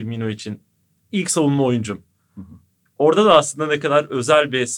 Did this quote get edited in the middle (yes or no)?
no